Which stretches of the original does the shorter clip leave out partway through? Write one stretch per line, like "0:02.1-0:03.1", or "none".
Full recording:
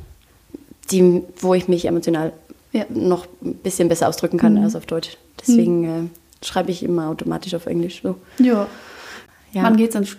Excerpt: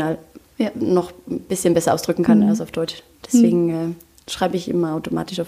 none